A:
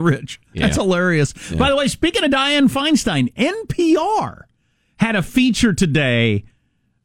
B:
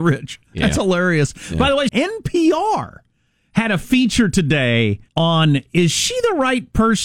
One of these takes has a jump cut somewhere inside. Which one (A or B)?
B